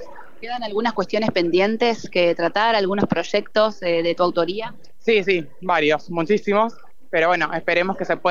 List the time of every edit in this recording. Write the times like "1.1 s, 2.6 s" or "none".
none